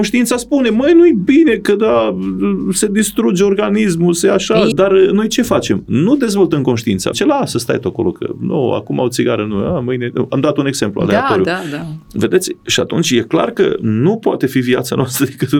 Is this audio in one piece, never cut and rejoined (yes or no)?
no